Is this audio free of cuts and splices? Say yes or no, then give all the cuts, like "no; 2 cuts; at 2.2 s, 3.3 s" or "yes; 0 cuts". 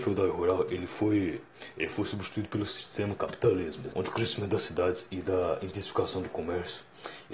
no; 1 cut; at 3.9 s